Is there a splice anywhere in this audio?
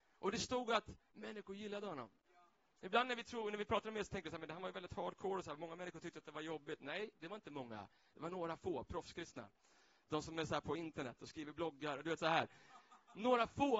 no; 0 cuts

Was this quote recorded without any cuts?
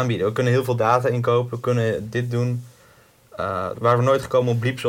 no; 1 cut; at 3.8 s

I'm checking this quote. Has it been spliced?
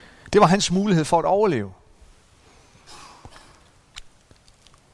no; 0 cuts

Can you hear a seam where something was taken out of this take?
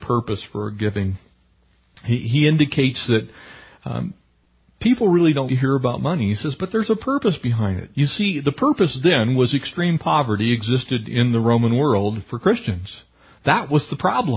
yes; 1 cut; at 5.5 s

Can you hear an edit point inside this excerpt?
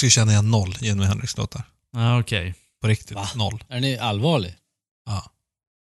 no; 0 cuts

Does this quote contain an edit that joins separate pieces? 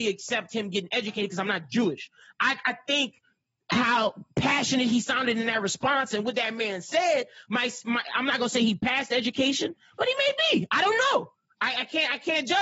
no; 0 cuts

